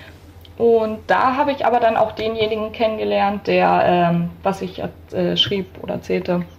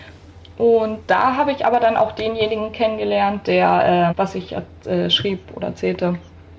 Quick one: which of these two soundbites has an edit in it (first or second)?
second